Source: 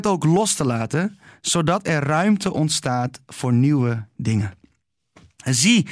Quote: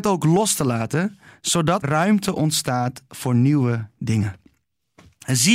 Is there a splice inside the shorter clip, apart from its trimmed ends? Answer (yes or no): yes